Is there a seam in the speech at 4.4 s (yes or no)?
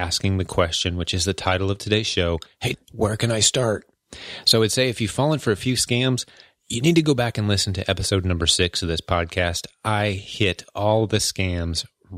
no